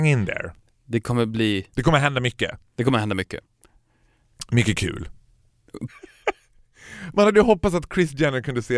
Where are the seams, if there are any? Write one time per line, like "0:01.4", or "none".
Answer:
0:05.9